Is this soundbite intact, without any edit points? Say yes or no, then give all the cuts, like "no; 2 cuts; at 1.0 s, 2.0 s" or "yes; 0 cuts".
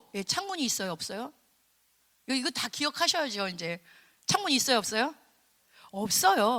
yes; 0 cuts